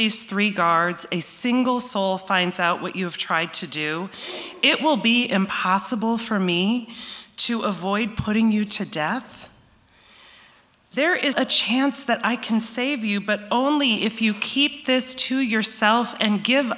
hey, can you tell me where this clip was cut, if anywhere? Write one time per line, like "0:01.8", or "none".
0:11.3